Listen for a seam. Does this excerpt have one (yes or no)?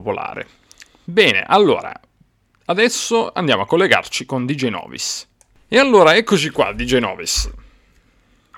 no